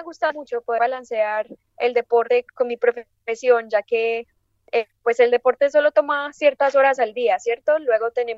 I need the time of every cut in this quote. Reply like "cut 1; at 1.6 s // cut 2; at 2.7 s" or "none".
cut 1; at 2.5 s